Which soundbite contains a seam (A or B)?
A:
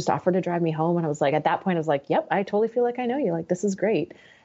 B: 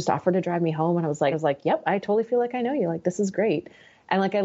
B